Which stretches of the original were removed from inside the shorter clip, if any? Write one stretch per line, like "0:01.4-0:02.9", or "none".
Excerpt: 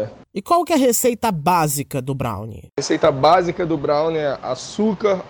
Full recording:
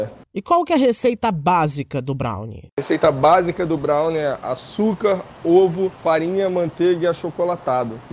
none